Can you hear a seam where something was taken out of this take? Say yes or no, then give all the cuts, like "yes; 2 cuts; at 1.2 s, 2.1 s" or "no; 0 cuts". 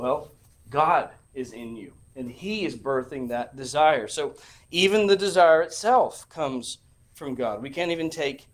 no; 0 cuts